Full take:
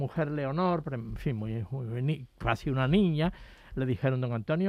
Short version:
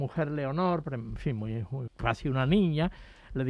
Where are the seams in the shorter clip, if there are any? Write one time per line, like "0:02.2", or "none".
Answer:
0:01.9